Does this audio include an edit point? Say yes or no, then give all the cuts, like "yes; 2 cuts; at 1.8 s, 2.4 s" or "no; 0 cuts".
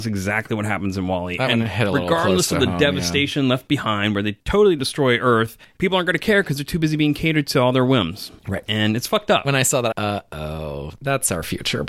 yes; 1 cut; at 9.9 s